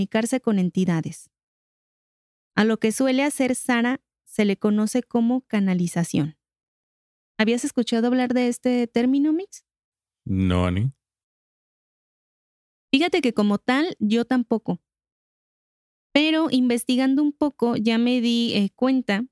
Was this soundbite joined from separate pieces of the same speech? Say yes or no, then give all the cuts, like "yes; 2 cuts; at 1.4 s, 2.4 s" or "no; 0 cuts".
no; 0 cuts